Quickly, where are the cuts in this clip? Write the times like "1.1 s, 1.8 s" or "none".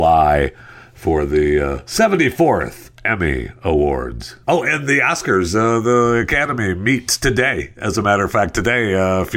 4.4 s